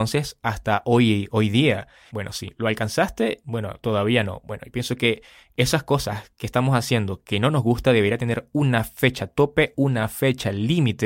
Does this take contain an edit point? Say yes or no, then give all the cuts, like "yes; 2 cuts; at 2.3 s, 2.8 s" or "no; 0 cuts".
yes; 1 cut; at 2.1 s